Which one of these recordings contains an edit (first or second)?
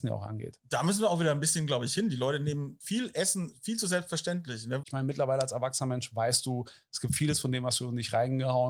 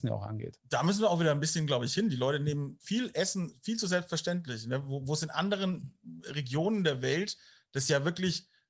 first